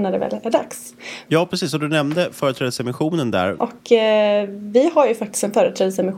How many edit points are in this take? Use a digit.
2